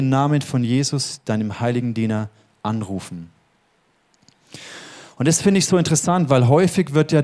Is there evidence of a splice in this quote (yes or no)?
no